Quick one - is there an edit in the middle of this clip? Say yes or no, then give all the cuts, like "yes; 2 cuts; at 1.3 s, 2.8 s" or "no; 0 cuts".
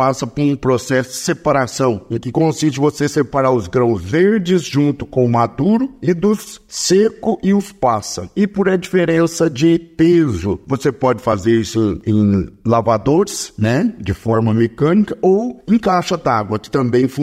no; 0 cuts